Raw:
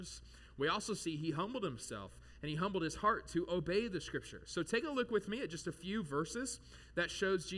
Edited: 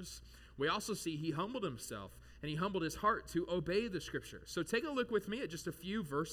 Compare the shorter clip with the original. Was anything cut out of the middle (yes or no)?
no